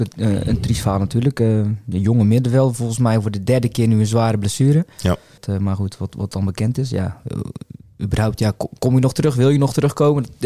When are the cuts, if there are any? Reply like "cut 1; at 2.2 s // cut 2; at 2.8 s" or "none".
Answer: cut 1; at 5.4 s